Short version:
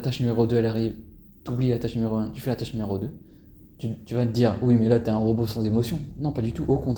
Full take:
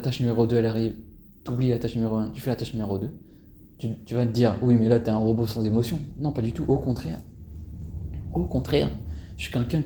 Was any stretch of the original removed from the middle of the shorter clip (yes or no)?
no